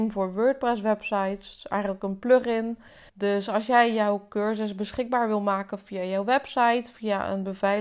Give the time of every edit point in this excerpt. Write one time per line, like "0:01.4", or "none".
0:03.1